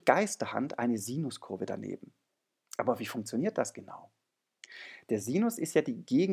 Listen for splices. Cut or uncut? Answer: uncut